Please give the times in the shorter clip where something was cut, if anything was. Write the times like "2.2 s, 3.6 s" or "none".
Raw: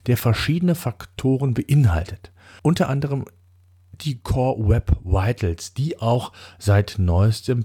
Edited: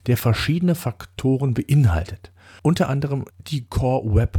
3.3 s

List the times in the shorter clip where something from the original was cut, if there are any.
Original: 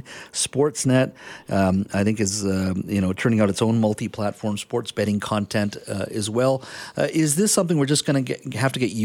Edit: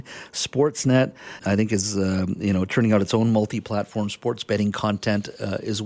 1.4 s

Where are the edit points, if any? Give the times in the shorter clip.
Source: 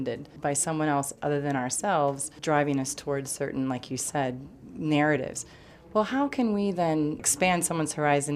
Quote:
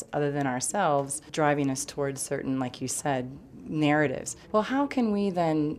4.4 s

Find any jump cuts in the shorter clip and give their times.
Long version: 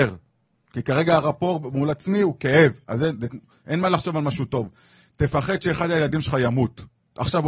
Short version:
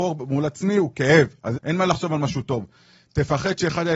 1.5 s

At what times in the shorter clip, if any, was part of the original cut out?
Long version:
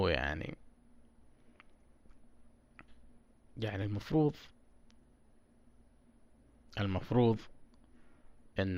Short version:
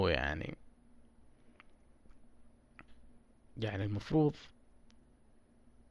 none

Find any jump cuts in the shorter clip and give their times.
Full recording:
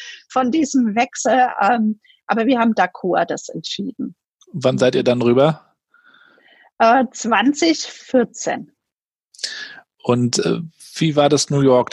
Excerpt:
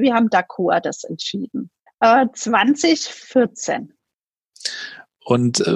1.9 s

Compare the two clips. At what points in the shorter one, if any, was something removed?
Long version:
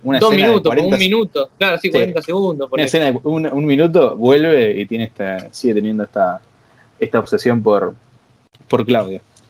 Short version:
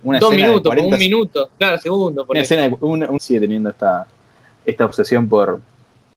1.8 s, 3.2 s

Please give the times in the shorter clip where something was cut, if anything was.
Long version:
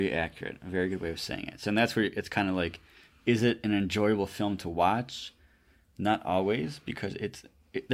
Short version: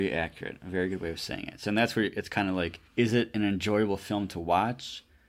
2.9 s

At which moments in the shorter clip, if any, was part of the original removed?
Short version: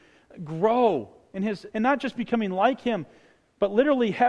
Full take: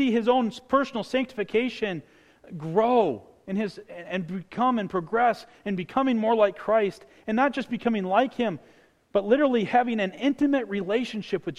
1.7 s

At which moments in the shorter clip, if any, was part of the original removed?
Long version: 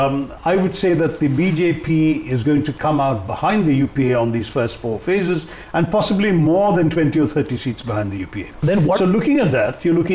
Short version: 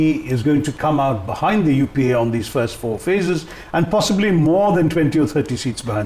none

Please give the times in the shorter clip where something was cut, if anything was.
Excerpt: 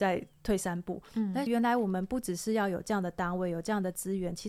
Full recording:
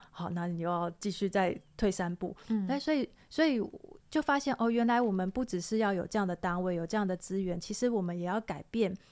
1.5 s

